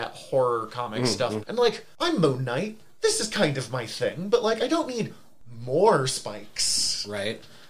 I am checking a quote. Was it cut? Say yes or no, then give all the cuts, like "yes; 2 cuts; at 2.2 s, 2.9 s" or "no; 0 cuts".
yes; 1 cut; at 1.4 s